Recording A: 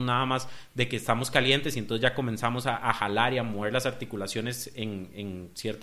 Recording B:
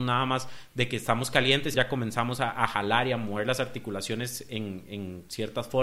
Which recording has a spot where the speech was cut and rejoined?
B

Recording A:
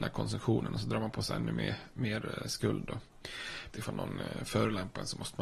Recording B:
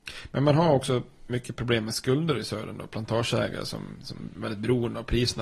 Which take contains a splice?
A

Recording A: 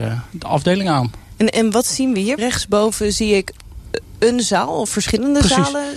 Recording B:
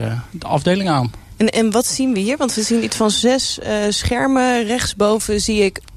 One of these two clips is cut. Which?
A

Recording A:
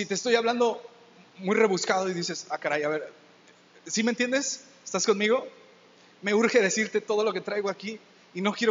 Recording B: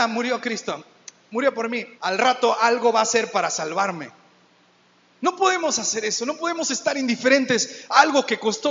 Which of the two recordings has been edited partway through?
B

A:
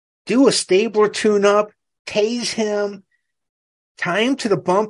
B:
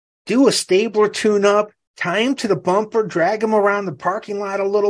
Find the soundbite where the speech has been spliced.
B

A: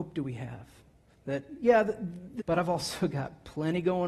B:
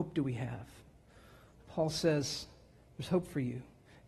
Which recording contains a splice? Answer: A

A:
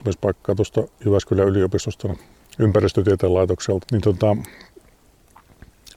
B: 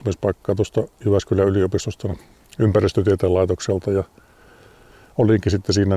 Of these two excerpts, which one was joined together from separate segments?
A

